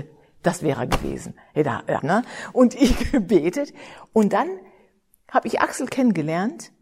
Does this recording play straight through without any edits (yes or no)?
no